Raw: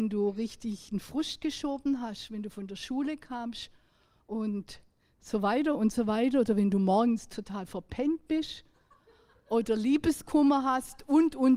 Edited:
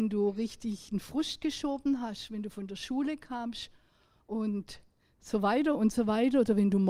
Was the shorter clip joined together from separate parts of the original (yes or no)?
no